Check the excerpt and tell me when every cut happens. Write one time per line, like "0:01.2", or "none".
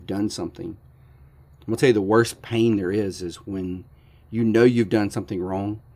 none